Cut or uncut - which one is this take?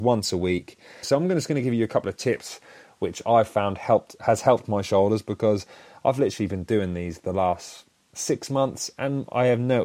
cut